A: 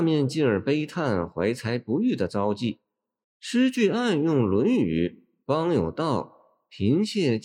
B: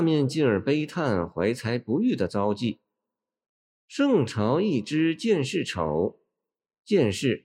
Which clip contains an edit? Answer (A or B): A